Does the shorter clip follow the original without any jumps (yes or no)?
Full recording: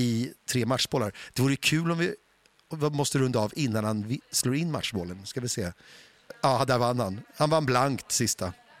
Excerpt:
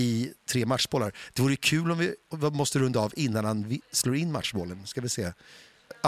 no